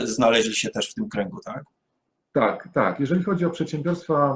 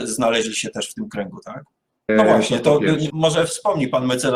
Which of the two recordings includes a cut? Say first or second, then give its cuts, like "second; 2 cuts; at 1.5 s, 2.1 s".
second; 2 cuts; at 2.1 s, 3.1 s